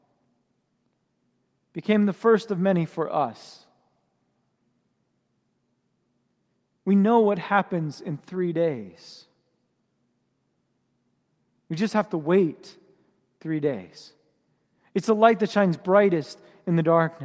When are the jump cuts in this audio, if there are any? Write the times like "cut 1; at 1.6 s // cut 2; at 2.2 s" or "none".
none